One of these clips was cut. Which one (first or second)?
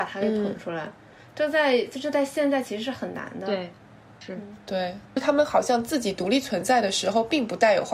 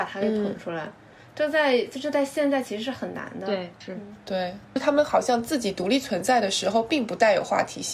second